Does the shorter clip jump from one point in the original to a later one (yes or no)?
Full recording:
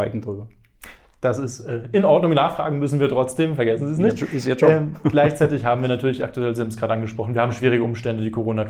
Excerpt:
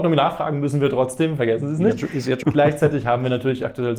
yes